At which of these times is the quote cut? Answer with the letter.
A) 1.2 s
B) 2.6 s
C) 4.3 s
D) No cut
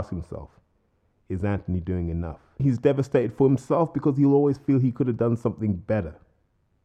B